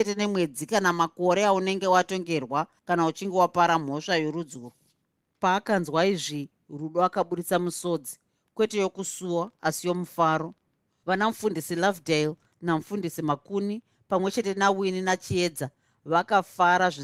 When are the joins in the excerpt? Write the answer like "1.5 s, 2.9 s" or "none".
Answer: none